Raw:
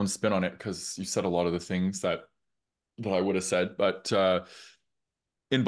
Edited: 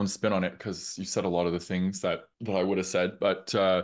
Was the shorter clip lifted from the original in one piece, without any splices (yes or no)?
no